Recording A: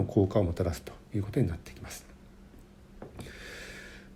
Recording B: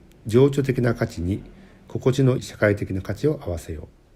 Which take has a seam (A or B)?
B